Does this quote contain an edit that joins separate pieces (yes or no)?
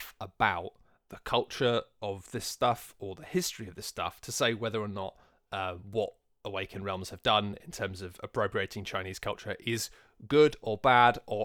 no